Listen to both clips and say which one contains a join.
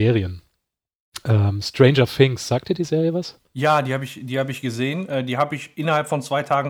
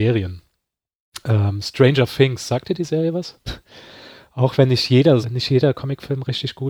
second; 2 cuts; at 3.5 s, 5.2 s

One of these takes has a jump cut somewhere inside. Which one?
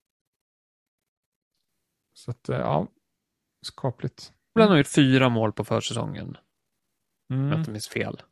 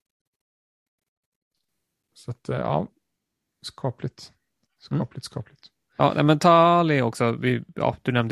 first; 1 cut; at 4.6 s

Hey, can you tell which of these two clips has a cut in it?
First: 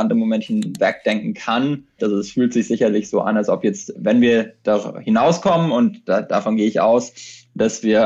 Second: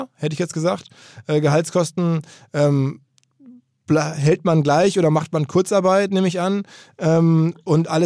first; 2 cuts; at 2.0 s, 3.9 s

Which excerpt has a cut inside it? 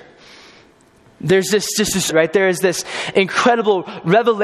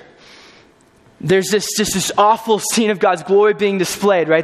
first; 1 cut; at 2.1 s

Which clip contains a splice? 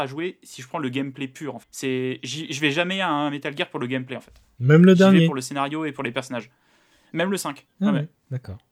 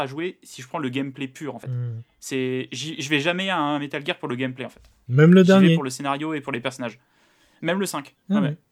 first; 1 cut; at 1.6 s

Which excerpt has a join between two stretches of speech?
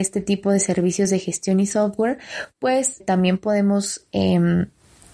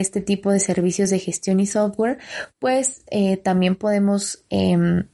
first; 1 cut; at 3.0 s

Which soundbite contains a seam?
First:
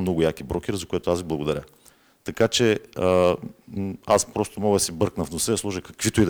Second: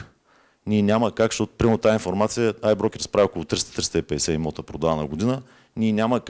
first; 1 cut; at 2.2 s

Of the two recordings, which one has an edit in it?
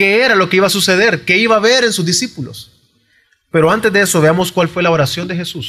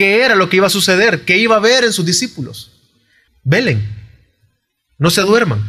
second; 1 cut; at 3.3 s

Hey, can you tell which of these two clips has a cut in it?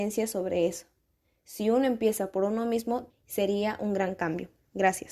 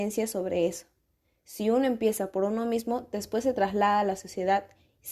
first; 1 cut; at 3.1 s

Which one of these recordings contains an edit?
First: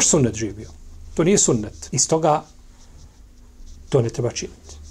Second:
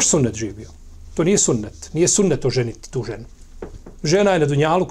first; 1 cut; at 1.9 s

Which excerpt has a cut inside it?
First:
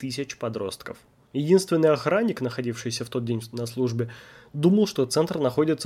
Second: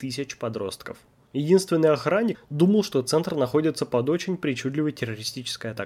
second; 1 cut; at 2.3 s

